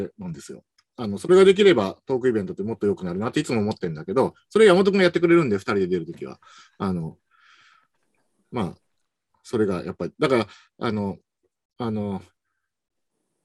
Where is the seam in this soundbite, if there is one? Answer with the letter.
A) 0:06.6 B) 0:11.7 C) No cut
B